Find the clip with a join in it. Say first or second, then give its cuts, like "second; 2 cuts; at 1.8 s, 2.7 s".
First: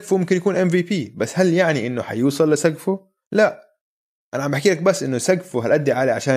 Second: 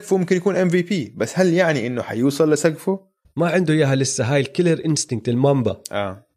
second; 1 cut; at 3.2 s